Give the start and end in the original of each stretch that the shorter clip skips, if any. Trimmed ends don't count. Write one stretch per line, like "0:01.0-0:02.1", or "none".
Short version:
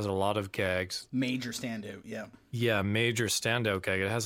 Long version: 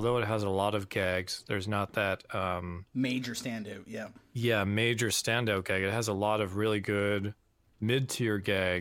0:01.4-0:02.9